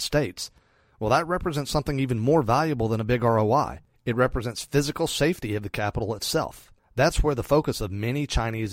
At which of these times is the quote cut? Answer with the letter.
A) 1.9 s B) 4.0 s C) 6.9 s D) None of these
D